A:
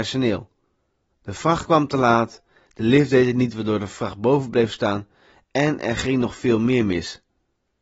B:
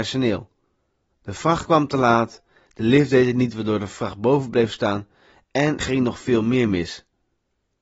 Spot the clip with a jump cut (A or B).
B